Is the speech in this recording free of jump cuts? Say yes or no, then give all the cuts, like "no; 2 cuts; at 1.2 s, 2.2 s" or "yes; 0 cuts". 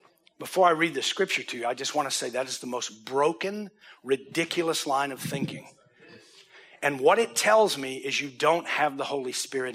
yes; 0 cuts